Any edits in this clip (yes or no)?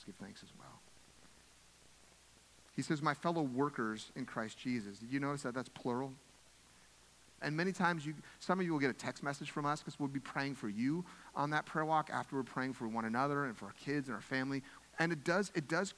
yes